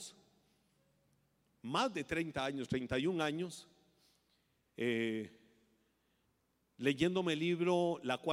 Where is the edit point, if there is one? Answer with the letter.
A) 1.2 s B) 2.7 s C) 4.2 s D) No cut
D